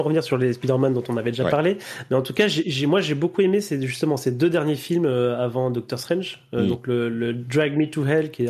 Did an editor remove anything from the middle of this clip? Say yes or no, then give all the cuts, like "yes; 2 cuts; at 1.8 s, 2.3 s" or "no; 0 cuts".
no; 0 cuts